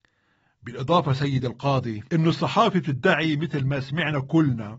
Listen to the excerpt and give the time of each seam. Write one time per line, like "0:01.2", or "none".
0:02.1